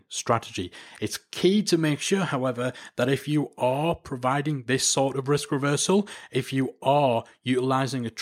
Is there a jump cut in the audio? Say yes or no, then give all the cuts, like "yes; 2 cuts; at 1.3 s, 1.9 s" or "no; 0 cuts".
no; 0 cuts